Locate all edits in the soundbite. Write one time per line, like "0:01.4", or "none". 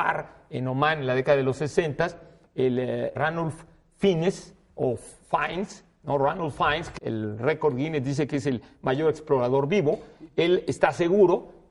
0:03.1
0:07.0